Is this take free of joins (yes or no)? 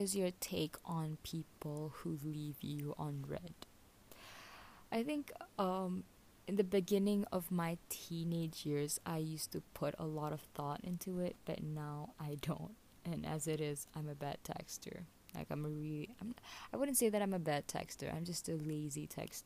yes